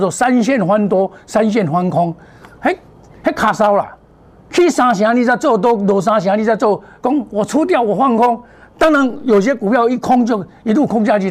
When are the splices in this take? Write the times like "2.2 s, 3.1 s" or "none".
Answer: none